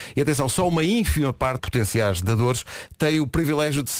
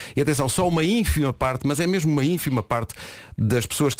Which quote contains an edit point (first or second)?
first